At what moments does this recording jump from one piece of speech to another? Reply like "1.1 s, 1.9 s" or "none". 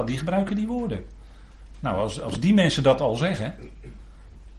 none